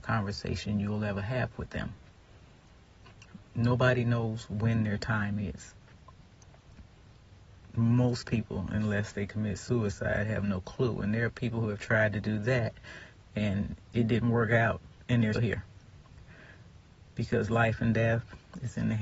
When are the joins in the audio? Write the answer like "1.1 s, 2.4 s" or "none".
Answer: 15.3 s